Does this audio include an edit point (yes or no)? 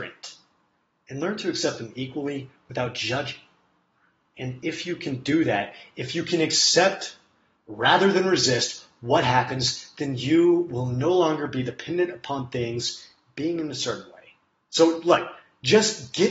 no